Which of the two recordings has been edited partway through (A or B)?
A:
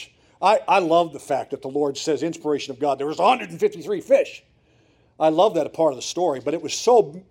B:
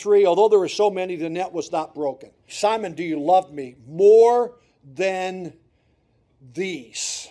B